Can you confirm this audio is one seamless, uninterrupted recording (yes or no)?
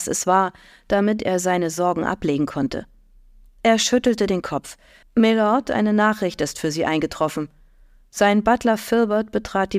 no